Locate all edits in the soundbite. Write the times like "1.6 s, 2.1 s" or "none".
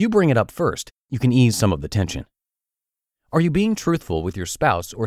1.0 s